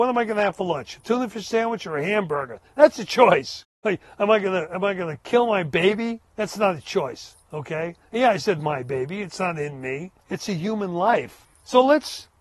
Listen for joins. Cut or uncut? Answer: cut